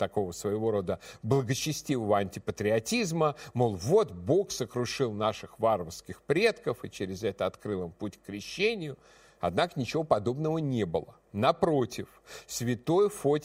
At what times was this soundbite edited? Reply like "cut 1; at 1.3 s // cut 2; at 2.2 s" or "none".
none